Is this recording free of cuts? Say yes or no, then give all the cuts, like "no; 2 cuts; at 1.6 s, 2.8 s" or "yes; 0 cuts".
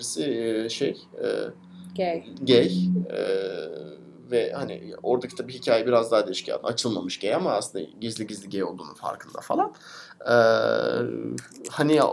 no; 1 cut; at 6.6 s